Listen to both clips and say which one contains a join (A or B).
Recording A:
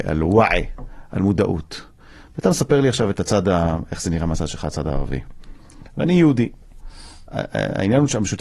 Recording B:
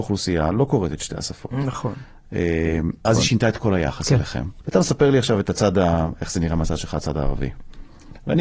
B